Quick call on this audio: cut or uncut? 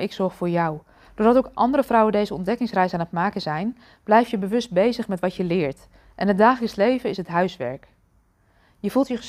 cut